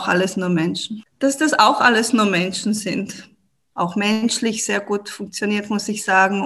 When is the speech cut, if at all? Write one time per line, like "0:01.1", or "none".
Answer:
0:01.1
0:03.7